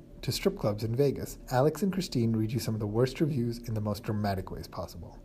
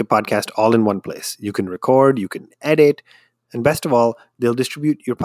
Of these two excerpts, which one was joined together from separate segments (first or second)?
first